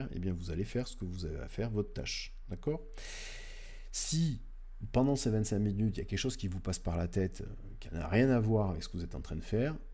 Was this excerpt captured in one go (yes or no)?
yes